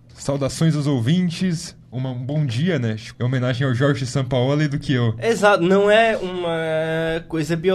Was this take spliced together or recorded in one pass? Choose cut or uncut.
cut